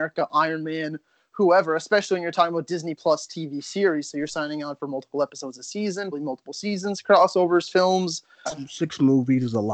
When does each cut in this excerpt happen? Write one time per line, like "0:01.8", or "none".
0:06.1
0:08.5